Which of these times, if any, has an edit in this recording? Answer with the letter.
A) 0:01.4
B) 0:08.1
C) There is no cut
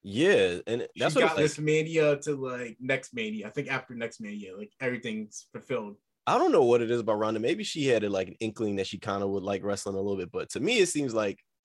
A